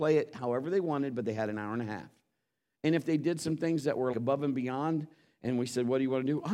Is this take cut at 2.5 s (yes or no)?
no